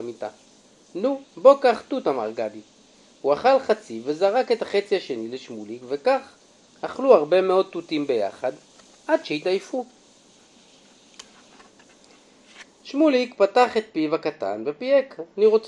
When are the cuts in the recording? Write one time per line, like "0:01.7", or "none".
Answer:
0:01.2